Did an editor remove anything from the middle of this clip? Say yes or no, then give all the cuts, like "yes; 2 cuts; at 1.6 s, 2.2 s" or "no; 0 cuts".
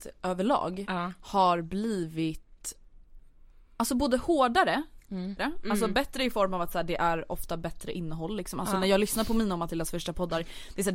yes; 1 cut; at 5.4 s